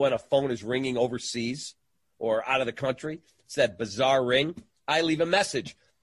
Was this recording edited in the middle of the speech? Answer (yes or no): no